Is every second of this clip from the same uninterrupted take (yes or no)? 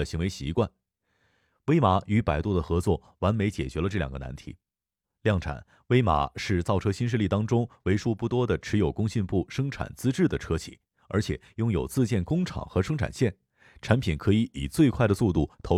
yes